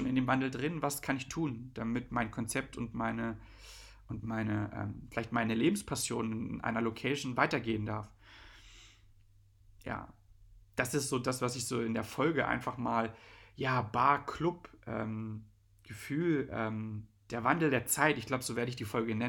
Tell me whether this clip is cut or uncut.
uncut